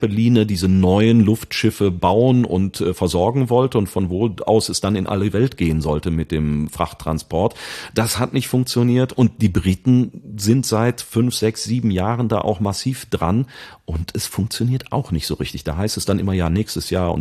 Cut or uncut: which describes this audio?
uncut